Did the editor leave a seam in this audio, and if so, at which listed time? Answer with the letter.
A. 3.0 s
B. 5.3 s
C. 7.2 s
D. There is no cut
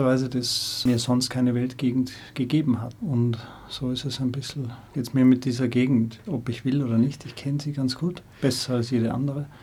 A